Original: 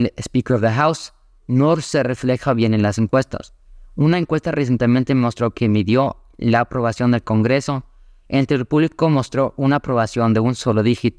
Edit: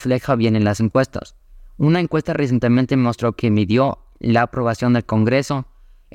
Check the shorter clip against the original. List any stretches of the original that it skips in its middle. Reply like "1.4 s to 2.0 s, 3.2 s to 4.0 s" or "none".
none